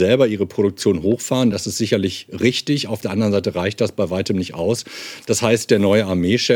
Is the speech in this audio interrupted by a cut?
no; 0 cuts

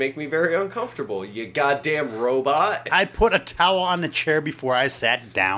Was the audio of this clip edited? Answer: no; 0 cuts

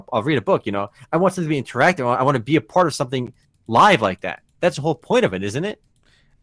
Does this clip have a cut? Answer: no; 0 cuts

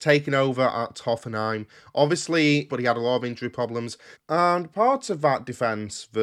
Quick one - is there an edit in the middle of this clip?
yes; 2 cuts; at 2.7 s, 4.1 s

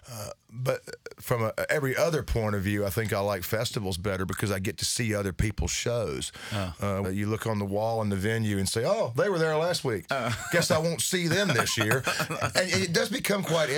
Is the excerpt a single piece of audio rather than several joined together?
no; 2 cuts; at 7.0 s, 10.1 s

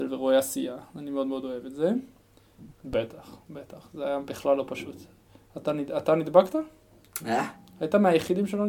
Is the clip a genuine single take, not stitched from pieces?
no; 1 cut; at 2.7 s

